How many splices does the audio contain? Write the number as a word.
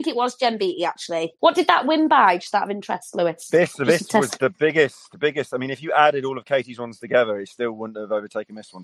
zero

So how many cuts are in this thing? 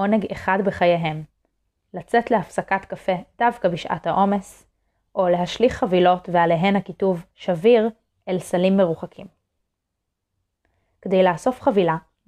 zero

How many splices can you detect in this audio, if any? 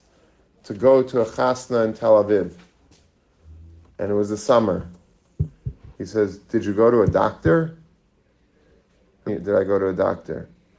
two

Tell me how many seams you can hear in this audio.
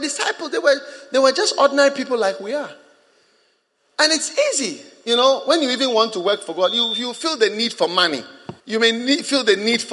one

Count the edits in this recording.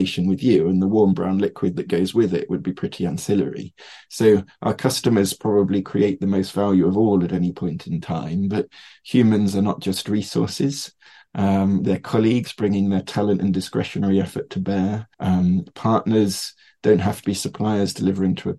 two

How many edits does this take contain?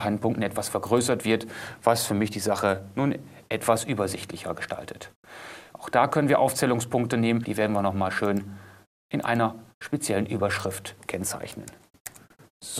two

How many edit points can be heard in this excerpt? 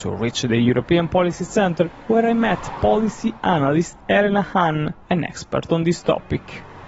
one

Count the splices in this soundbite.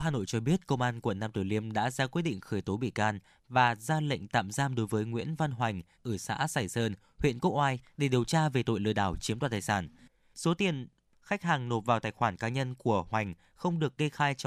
three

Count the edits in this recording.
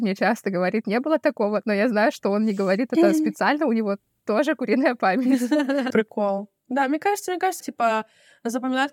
two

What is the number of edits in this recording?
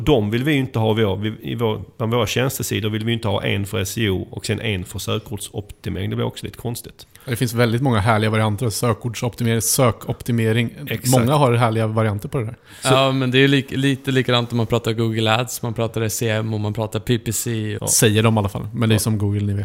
one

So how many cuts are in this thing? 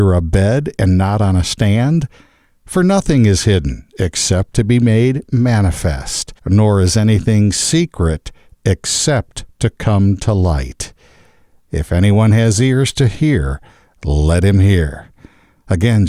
one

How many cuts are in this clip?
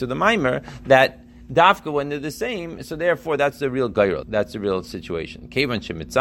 one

